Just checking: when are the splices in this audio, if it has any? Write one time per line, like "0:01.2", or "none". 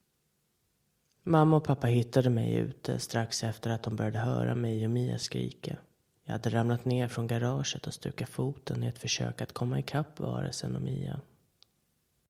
none

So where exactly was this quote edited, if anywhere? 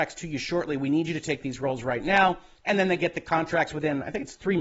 0:02.6

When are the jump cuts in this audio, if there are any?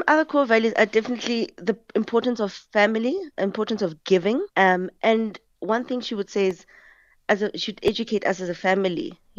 0:04.5

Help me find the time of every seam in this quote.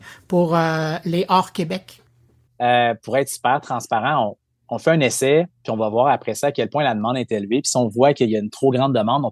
0:02.5

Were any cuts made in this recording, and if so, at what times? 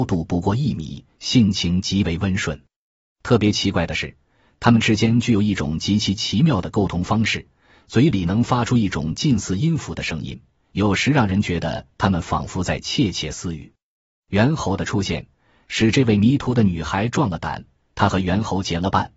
none

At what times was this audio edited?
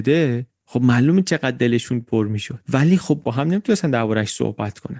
0:02.6

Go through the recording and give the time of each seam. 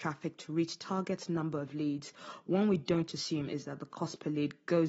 none

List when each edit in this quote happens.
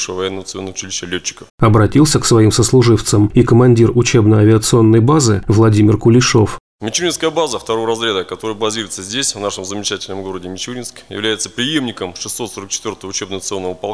0:01.5

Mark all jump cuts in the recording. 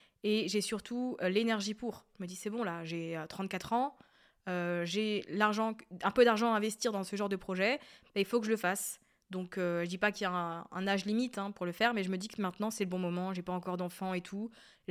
none

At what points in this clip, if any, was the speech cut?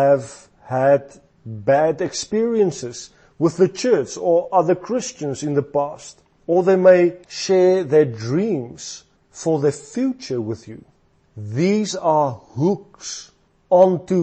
0:07.2

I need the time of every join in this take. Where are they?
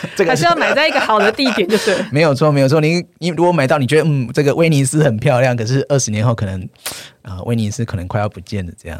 none

